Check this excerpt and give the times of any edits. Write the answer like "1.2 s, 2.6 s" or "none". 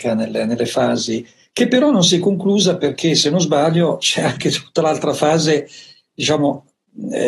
none